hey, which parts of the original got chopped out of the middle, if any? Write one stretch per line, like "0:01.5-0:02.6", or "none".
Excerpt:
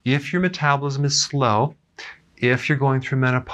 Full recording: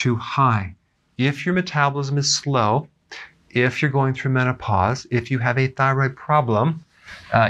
none